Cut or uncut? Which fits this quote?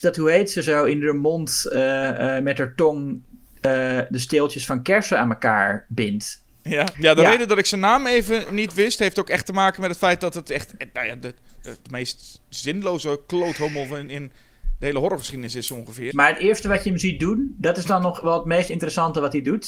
cut